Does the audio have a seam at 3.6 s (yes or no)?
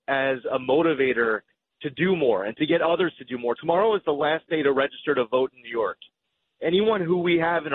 no